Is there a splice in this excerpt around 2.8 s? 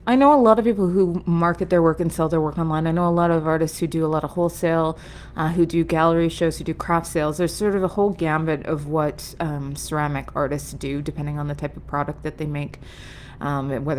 no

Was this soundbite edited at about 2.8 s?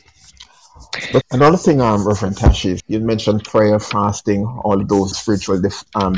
yes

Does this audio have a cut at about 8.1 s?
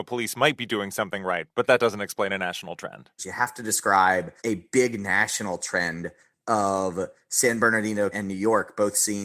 yes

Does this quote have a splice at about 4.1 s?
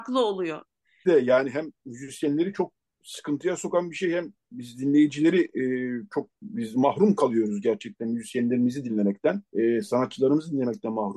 no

